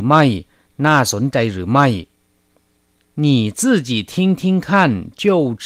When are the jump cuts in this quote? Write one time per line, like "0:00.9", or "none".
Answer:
none